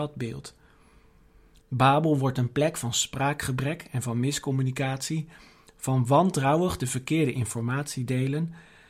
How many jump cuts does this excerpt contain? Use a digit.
1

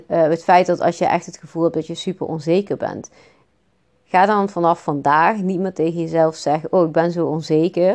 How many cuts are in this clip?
0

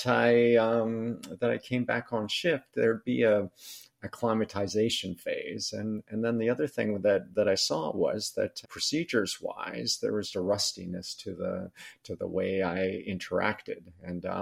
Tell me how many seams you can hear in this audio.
2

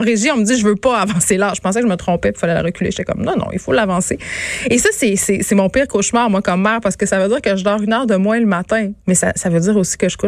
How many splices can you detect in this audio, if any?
1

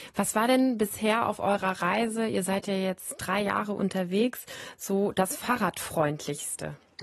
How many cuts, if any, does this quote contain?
0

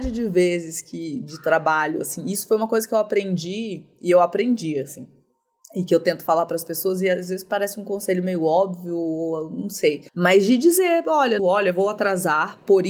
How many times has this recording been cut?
2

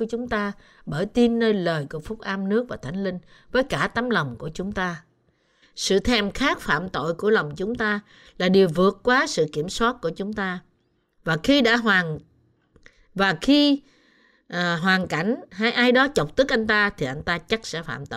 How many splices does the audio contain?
2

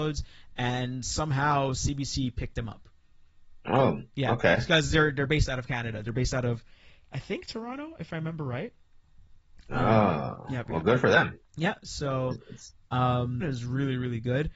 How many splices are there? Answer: 1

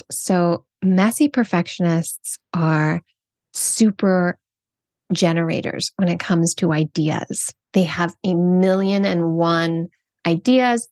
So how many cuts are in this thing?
0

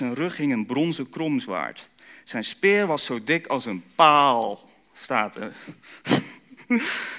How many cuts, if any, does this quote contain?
0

